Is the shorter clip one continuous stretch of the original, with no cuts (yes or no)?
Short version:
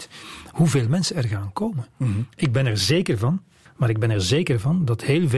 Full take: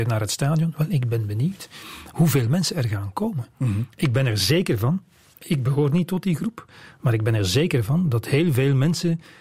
no